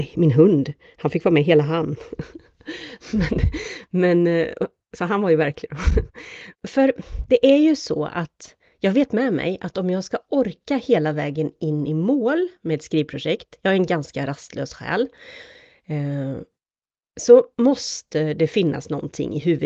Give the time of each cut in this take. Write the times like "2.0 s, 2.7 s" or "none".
6.5 s